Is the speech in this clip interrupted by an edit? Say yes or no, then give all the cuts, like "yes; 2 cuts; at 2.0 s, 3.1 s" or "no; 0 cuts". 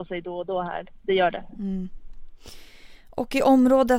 no; 0 cuts